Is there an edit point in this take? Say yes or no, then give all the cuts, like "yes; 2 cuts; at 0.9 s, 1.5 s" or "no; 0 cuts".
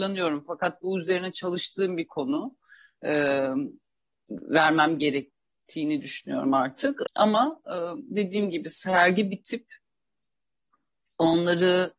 yes; 1 cut; at 7.1 s